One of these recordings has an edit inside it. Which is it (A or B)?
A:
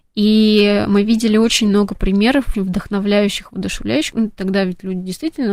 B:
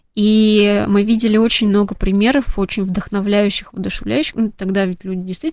A